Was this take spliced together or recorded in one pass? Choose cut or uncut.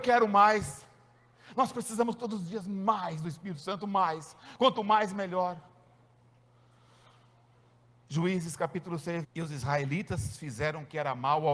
cut